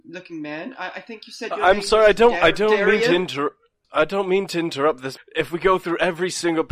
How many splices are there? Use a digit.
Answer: 2